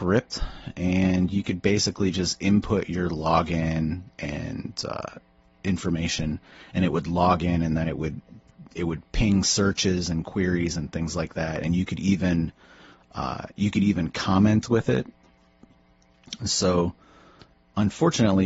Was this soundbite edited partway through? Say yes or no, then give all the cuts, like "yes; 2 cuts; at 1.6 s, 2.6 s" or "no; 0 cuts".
no; 0 cuts